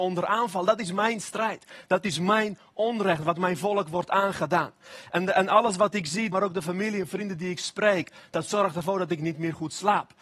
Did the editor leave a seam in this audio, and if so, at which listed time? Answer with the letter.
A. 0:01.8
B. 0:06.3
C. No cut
B